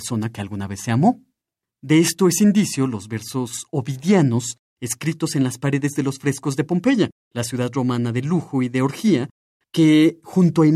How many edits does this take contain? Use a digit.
1